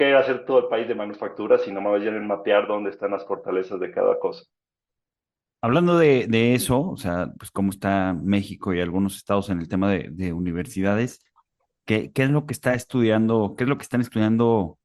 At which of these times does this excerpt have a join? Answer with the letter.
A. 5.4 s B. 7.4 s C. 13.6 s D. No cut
B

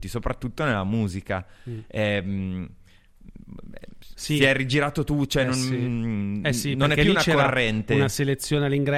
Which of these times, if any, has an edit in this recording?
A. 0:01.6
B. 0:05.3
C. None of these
C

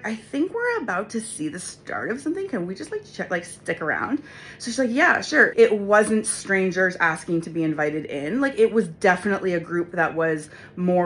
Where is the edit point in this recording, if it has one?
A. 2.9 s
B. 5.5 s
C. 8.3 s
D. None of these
B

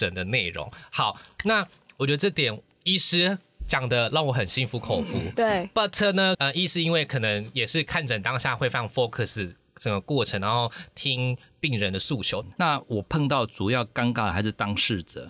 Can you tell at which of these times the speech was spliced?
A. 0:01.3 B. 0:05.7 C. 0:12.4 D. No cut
C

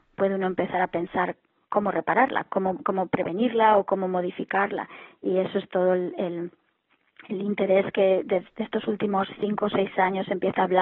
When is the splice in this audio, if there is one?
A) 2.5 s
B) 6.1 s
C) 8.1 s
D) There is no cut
D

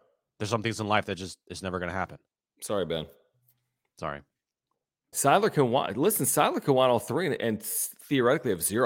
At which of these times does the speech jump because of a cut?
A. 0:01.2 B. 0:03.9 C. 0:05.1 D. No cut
C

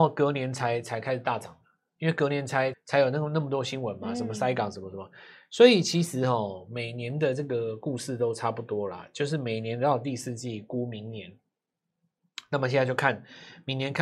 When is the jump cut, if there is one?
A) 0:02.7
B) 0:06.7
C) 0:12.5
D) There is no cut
A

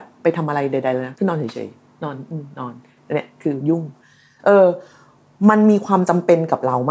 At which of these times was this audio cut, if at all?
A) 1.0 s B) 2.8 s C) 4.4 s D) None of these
D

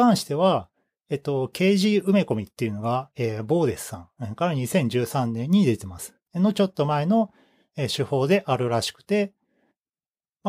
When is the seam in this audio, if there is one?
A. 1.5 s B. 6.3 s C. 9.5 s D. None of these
B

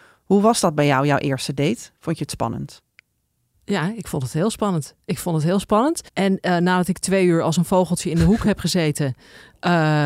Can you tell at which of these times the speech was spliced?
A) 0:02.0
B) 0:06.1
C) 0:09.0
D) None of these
B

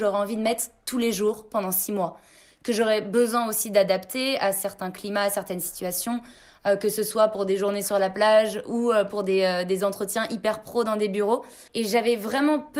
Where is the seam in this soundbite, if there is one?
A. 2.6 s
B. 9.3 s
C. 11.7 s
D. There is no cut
C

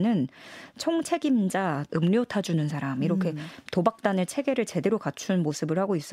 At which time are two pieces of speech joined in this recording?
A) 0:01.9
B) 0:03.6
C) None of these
A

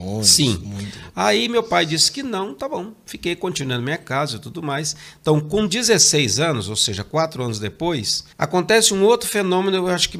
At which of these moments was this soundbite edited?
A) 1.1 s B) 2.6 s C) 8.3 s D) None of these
C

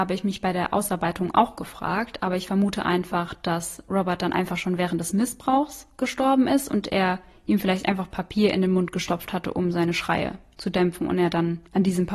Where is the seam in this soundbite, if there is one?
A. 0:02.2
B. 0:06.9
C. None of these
C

